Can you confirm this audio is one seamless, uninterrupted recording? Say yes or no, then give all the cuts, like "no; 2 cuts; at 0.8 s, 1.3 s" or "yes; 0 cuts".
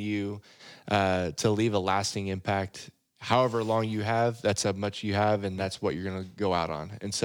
yes; 0 cuts